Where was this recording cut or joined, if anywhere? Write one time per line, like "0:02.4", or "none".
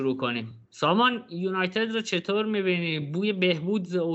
none